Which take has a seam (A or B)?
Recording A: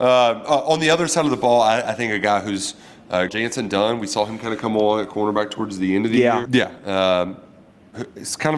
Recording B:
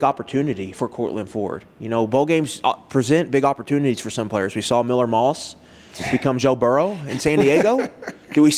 A